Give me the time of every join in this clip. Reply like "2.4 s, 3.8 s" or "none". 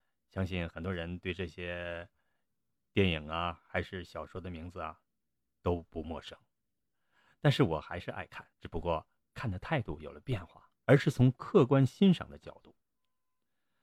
6.8 s, 8.5 s, 10.8 s